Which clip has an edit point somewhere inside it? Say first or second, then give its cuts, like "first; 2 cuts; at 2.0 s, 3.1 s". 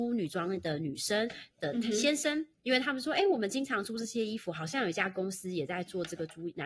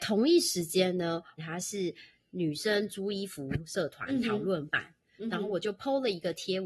second; 1 cut; at 1.4 s